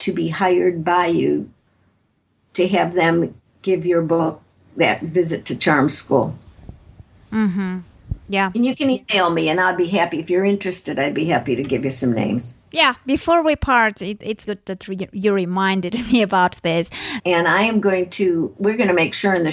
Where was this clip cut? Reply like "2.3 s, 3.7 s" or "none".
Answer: 14.4 s, 17.2 s